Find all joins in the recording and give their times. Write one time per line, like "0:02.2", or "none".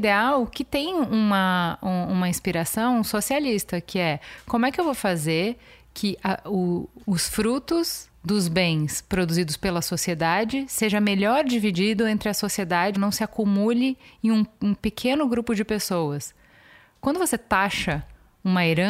0:12.9